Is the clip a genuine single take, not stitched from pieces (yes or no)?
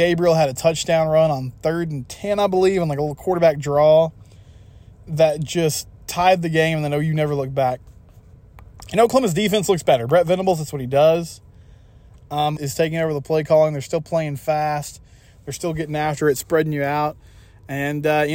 no